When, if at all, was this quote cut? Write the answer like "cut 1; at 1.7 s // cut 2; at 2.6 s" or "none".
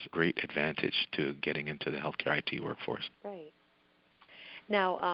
cut 1; at 3.2 s